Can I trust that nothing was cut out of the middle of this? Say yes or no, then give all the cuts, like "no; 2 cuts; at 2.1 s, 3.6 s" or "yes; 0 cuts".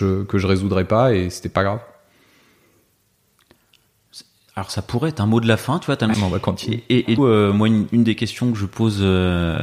no; 2 cuts; at 6.1 s, 7.2 s